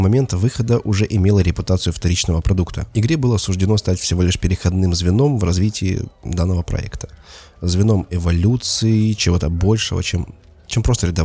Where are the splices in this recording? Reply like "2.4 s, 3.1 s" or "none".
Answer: 2.9 s